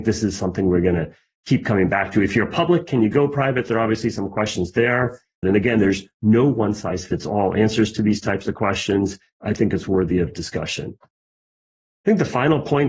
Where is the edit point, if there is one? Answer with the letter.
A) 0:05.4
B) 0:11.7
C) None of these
A